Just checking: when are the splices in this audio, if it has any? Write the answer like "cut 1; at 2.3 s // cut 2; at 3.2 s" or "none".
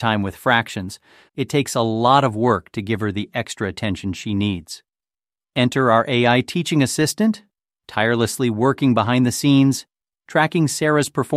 cut 1; at 1.3 s